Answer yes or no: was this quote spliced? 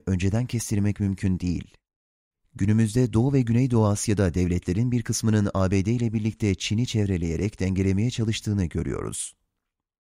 no